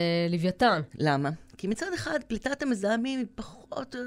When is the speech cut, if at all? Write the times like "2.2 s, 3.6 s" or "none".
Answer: 0.9 s

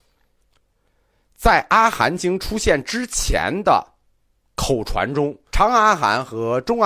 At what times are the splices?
5.5 s

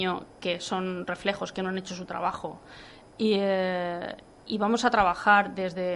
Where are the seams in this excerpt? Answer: none

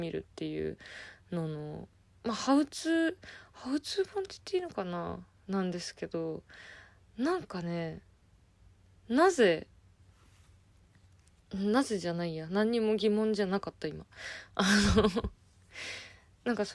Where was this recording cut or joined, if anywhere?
none

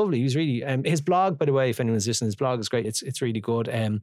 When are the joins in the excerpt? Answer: 2.8 s

